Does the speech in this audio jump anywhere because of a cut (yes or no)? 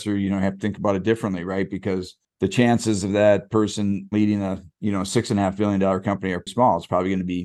yes